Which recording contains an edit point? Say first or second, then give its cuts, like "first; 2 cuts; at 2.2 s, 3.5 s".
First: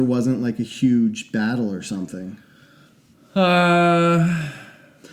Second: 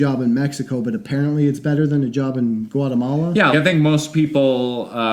second; 1 cut; at 3.5 s